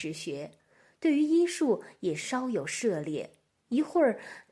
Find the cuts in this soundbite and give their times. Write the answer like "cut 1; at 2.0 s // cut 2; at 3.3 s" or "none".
cut 1; at 3.5 s